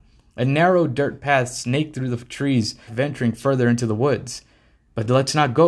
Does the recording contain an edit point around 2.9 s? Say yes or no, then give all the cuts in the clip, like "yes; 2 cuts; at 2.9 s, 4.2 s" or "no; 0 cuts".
yes; 1 cut; at 2.9 s